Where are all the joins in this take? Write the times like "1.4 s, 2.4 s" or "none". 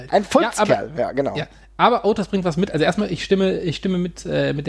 none